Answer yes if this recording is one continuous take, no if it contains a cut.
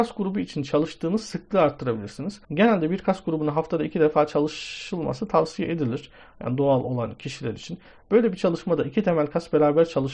no